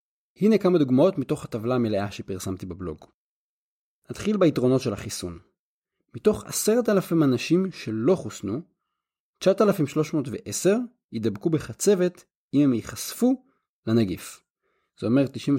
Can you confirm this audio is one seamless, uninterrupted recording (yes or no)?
yes